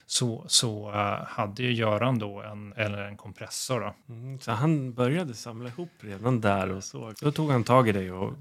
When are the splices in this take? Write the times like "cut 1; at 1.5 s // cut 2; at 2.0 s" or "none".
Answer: cut 1; at 2.7 s // cut 2; at 4.0 s // cut 3; at 7.1 s

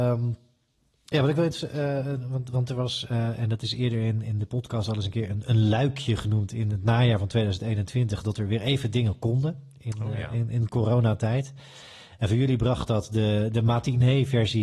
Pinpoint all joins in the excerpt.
none

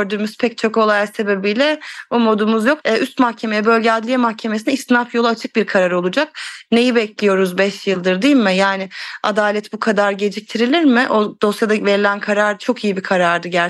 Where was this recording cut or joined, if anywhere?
cut 1; at 2.8 s // cut 2; at 6.7 s

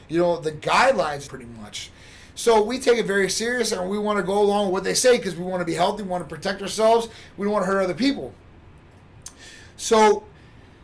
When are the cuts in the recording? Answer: cut 1; at 1.3 s

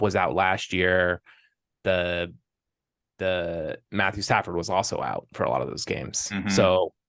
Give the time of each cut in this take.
none

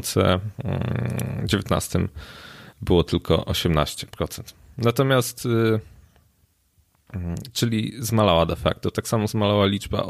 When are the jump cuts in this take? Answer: cut 1; at 2.7 s

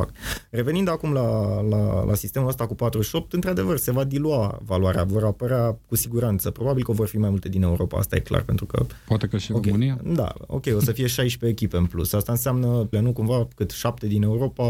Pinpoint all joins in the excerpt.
cut 1; at 12.9 s

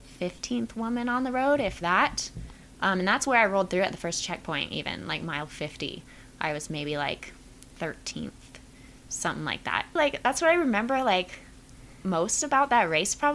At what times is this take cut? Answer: cut 1; at 10.0 s

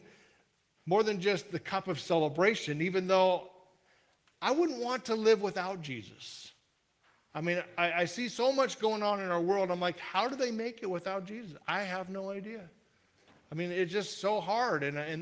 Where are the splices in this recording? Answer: none

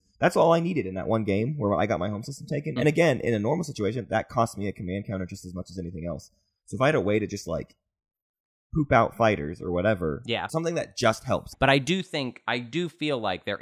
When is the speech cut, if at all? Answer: cut 1; at 2.8 s // cut 2; at 10.5 s // cut 3; at 11.5 s

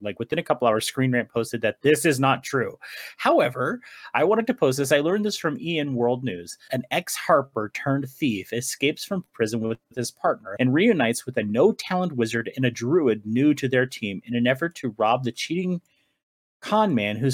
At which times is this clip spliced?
cut 1; at 6.7 s // cut 2; at 10.6 s

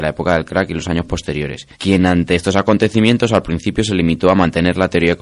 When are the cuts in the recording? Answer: cut 1; at 1.7 s

